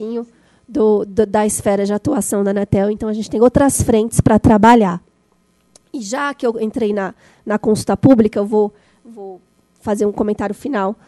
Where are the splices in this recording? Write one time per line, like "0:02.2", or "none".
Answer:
none